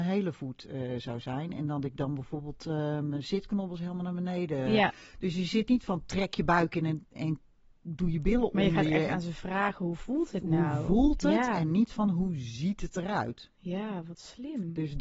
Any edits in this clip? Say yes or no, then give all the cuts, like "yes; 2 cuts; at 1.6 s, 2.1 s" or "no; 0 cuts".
no; 0 cuts